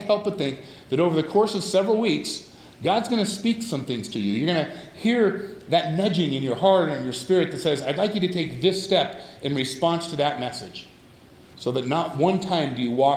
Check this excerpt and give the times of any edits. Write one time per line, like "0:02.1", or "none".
0:11.5

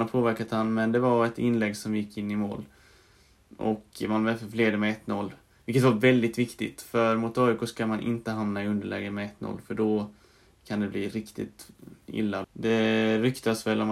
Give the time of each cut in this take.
0:12.4

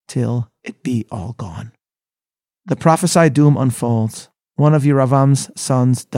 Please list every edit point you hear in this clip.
none

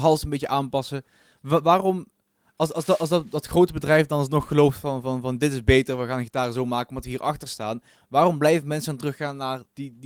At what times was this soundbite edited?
none

